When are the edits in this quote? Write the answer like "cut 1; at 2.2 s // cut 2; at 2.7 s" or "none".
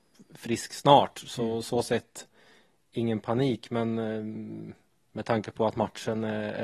none